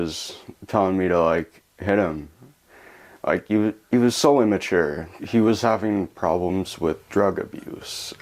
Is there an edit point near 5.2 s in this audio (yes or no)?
yes